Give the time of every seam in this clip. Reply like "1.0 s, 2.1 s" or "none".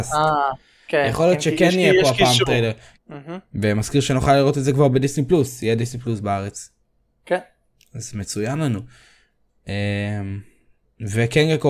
2.9 s